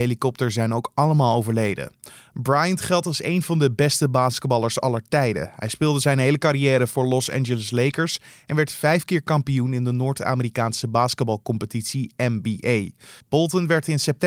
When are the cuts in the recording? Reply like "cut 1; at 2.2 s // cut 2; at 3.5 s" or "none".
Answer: cut 1; at 13.2 s

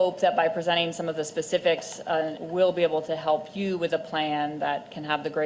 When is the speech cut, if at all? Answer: cut 1; at 2.4 s

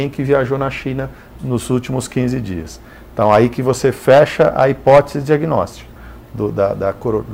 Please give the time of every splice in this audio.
cut 1; at 1.4 s

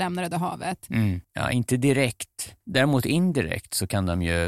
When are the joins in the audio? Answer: cut 1; at 1.2 s // cut 2; at 2.6 s

